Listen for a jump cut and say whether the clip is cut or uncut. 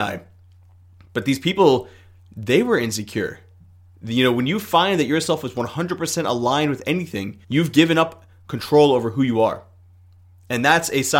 cut